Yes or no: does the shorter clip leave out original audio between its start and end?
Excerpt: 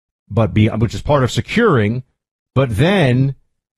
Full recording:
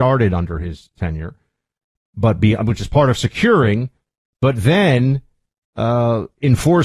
no